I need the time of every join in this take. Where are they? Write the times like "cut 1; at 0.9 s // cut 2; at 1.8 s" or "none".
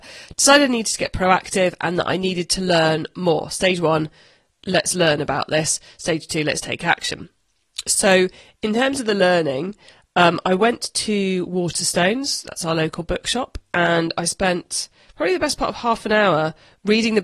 none